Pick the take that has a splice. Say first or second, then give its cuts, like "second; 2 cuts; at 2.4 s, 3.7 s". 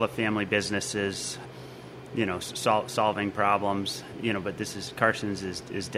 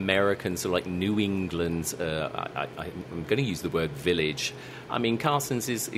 second; 1 cut; at 4.9 s